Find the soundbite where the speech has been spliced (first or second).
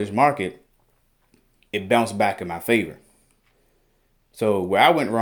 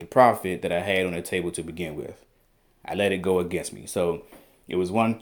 first